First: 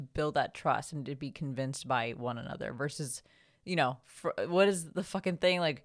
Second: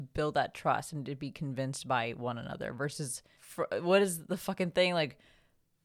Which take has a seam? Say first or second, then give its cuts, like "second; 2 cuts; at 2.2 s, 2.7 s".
second; 1 cut; at 3.3 s